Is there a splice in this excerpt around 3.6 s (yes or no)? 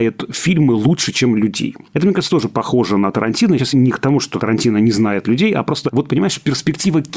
no